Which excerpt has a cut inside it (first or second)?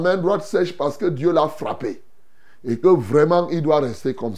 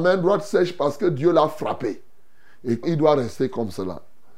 second